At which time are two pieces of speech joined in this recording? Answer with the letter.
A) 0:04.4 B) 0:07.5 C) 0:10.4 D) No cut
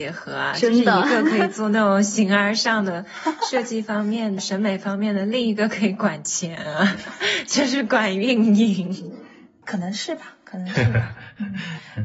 A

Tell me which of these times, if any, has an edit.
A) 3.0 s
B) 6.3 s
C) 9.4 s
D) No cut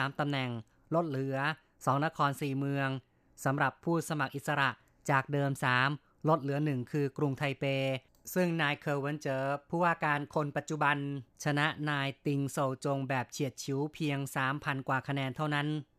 D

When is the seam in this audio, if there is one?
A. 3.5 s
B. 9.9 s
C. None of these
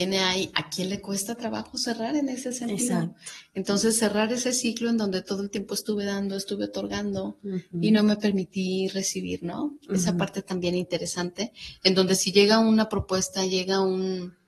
C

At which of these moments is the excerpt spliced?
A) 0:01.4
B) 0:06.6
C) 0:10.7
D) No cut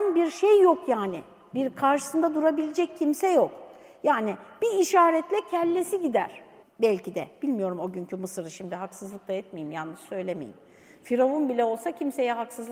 B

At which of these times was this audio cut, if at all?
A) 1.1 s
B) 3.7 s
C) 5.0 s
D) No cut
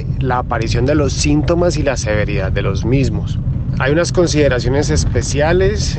D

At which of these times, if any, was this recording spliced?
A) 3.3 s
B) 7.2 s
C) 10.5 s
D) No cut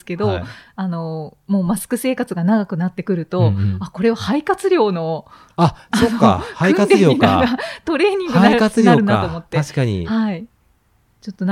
D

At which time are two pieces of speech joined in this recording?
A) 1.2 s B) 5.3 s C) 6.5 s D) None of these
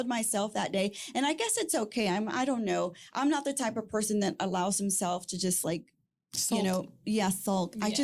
D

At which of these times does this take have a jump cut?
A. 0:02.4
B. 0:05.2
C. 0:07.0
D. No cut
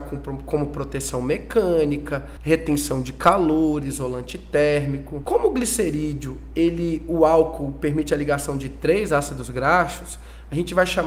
B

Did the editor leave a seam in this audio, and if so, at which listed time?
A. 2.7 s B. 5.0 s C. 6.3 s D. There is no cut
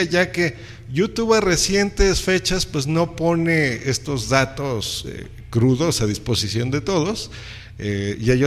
D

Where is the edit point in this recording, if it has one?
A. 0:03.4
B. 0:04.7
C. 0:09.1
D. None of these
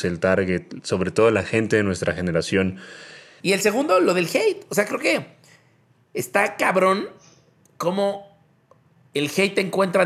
A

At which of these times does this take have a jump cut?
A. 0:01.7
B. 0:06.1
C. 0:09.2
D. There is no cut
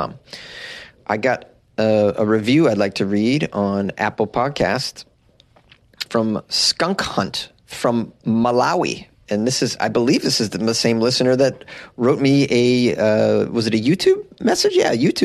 B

